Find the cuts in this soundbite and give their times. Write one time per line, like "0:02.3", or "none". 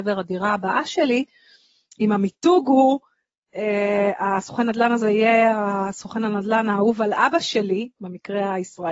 none